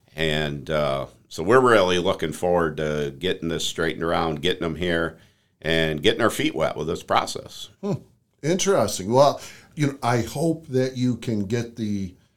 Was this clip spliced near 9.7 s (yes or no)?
yes